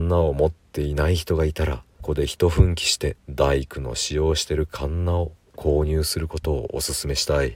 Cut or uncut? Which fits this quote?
cut